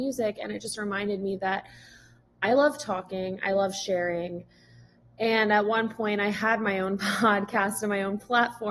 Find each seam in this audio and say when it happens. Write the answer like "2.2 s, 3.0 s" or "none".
none